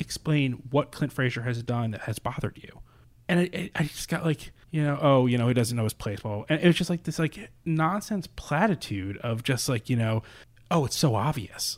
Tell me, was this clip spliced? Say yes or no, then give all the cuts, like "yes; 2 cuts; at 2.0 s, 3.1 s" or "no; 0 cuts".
no; 0 cuts